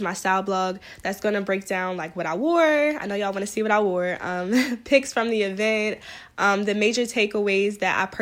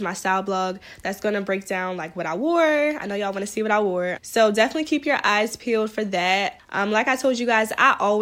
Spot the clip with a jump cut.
second; 2 cuts; at 4.2 s, 6.6 s

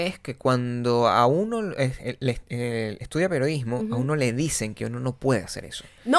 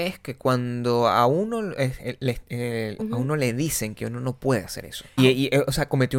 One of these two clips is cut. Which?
second; 2 cuts; at 3.0 s, 5.2 s

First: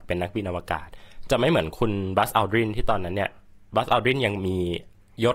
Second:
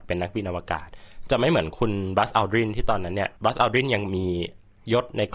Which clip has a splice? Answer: second; 1 cut; at 3.4 s

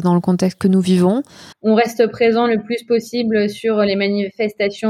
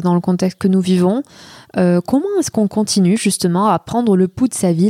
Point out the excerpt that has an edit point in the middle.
first; 1 cut; at 1.5 s

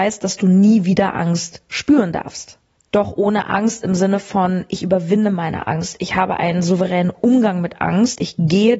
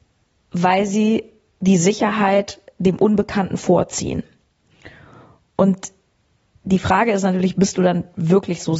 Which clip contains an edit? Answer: first; 1 cut; at 2.8 s

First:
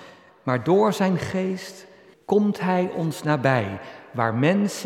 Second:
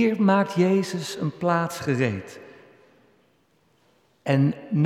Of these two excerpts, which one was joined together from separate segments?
first; 1 cut; at 2.1 s

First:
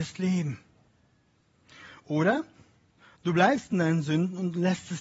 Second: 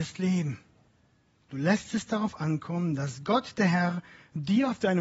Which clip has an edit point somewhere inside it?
second; 1 cut; at 1.4 s

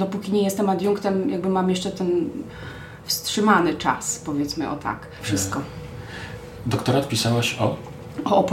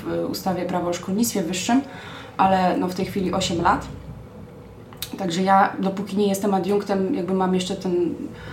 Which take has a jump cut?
first; 1 cut; at 5.2 s

